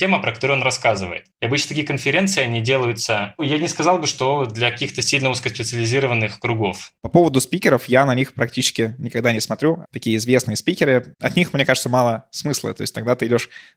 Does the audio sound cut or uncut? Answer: cut